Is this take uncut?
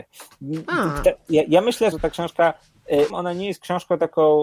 no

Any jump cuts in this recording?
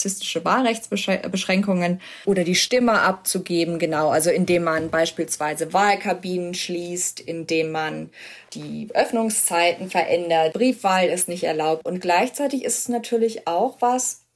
yes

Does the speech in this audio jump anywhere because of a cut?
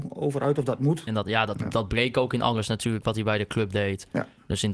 yes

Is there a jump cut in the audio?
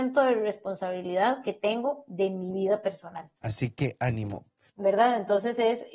yes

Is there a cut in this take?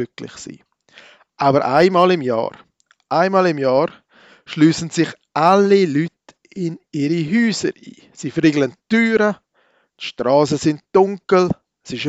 no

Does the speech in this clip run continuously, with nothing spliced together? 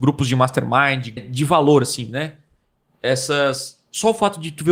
no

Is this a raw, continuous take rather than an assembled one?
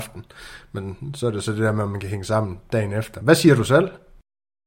yes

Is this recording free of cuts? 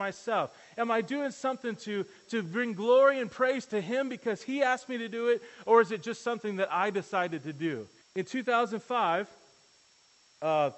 no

